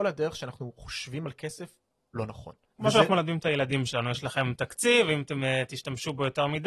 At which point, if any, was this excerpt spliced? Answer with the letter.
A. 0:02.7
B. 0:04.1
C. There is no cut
A